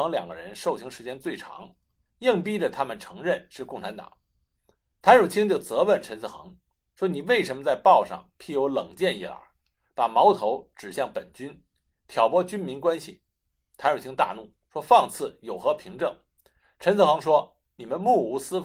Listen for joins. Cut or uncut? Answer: cut